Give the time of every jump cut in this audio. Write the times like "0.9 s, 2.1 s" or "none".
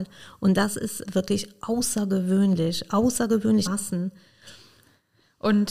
1.0 s, 3.7 s